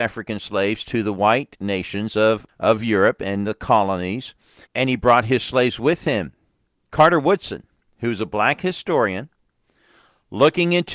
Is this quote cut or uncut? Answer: cut